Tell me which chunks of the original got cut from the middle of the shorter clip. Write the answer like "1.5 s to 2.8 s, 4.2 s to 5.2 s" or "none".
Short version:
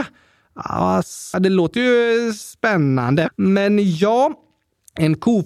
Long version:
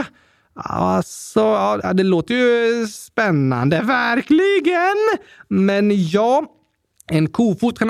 1.3 s to 1.9 s, 3.8 s to 5.4 s